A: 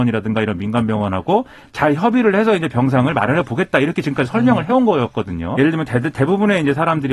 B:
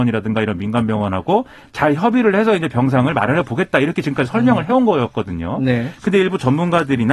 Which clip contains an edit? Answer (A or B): A